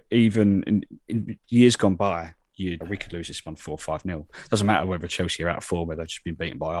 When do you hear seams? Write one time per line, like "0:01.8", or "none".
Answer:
0:02.8